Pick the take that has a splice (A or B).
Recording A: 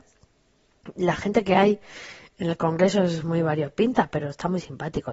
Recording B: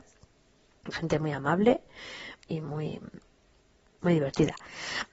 B